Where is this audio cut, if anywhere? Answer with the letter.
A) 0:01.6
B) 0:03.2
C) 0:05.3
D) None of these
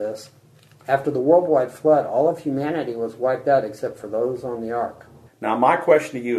C